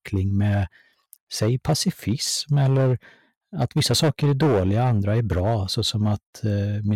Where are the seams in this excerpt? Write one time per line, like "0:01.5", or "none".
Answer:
0:01.2